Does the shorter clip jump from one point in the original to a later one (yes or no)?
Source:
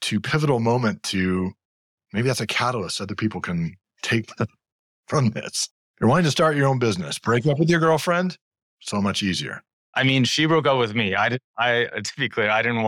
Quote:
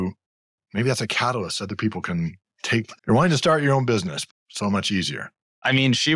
yes